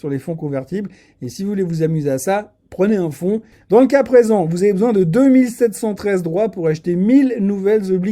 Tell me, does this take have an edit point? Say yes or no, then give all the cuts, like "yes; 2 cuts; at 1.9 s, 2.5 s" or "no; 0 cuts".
yes; 1 cut; at 3.5 s